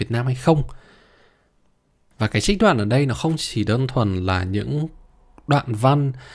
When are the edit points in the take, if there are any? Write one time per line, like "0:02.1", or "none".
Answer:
0:02.1